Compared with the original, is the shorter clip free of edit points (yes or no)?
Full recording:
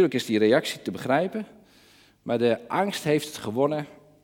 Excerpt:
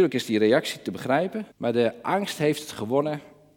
no